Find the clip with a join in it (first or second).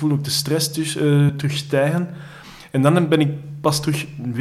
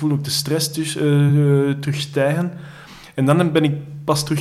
first